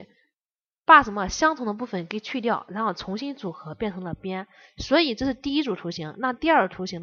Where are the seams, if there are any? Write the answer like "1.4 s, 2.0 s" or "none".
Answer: none